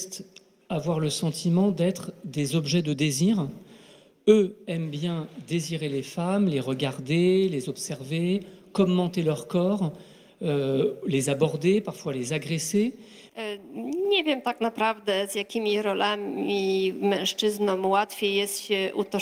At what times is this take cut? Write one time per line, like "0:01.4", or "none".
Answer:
0:13.3